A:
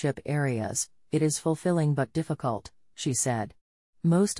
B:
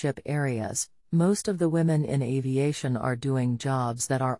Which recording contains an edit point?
B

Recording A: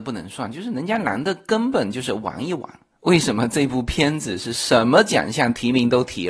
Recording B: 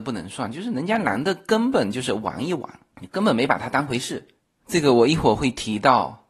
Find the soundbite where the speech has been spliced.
A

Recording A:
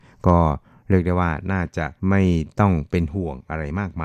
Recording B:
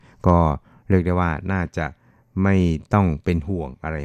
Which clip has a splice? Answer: A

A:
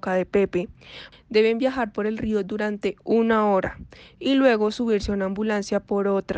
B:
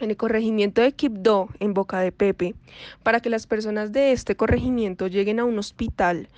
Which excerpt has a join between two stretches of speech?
A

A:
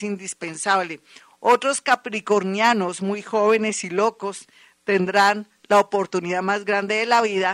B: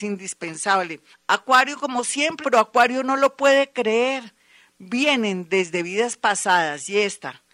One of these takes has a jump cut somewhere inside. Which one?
B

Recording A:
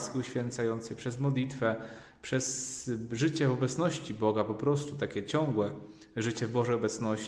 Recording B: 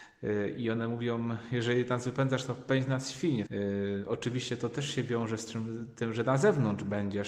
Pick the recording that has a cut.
B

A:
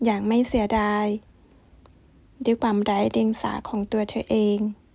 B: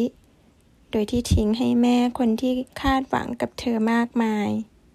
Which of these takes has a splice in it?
B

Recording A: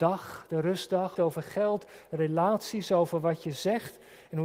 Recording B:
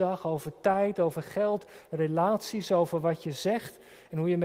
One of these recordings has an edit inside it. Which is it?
A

